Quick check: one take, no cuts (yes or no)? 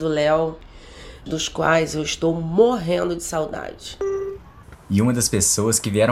no